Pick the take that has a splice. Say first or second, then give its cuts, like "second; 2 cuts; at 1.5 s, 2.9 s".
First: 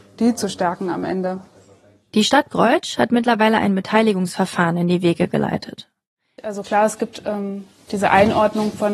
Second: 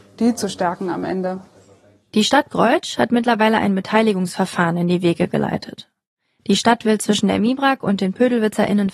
first; 1 cut; at 6.4 s